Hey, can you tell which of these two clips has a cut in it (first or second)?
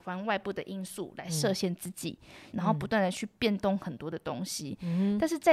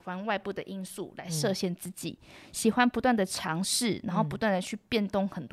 first